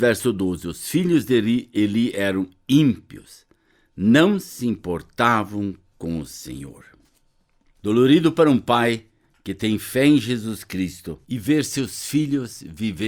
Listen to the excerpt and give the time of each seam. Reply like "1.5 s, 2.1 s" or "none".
7.7 s, 11.2 s